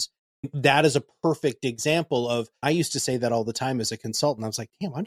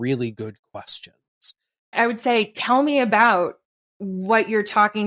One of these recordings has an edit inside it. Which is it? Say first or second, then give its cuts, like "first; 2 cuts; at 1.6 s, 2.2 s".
second; 1 cut; at 1.8 s